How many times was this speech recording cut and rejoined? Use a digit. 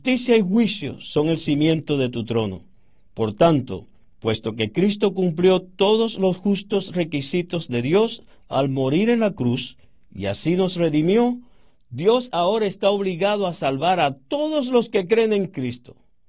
0